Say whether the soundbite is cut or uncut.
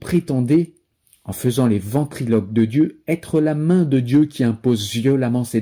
uncut